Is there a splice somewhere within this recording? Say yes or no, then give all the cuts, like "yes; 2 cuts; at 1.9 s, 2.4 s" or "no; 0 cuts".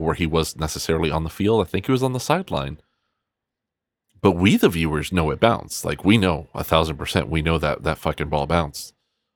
no; 0 cuts